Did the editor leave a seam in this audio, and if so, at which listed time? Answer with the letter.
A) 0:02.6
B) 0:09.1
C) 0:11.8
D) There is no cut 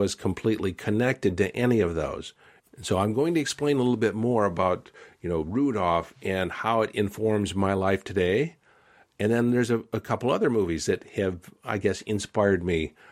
A